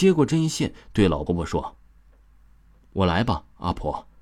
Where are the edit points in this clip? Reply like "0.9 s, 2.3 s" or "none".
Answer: 1.3 s